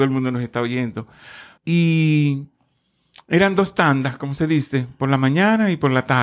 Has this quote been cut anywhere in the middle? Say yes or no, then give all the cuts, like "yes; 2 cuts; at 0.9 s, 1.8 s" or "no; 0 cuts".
yes; 1 cut; at 1.6 s